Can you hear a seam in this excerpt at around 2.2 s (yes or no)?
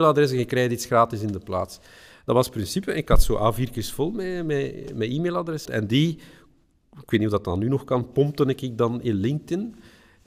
no